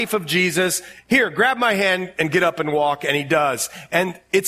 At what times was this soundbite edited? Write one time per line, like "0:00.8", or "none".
none